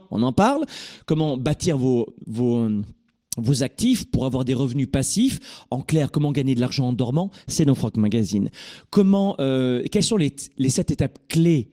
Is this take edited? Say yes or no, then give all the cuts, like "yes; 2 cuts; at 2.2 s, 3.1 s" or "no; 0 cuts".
no; 0 cuts